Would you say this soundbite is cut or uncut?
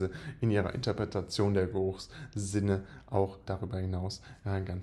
cut